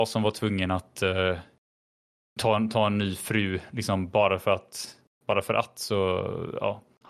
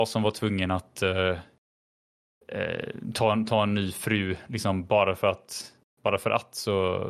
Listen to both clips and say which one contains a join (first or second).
first